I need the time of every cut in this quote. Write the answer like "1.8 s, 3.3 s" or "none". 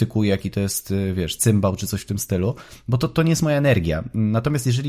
none